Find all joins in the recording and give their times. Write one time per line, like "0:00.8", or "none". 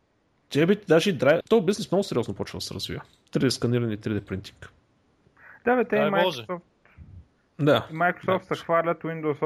0:01.4